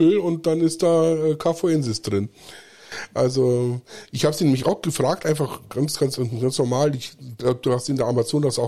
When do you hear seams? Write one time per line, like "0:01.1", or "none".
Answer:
none